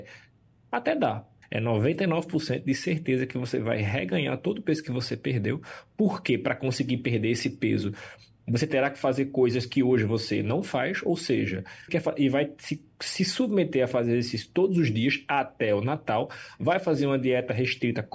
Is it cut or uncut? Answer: cut